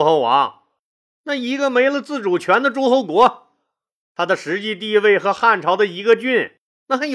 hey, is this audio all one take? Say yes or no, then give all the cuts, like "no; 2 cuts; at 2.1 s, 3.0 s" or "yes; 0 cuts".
yes; 0 cuts